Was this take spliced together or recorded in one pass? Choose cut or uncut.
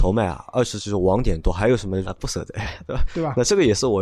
cut